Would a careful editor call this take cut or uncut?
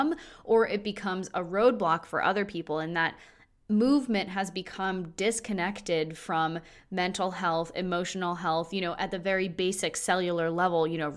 uncut